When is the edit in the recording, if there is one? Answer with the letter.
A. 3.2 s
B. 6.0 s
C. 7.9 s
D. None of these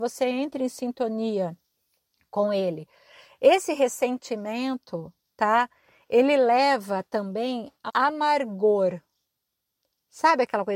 C